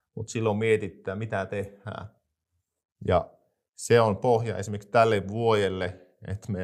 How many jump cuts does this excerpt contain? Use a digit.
1